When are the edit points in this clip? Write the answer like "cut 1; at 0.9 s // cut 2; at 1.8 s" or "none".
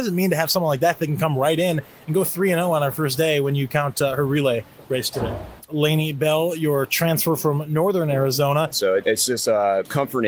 cut 1; at 5.7 s // cut 2; at 8.7 s